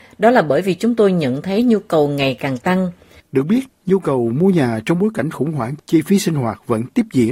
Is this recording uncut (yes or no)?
no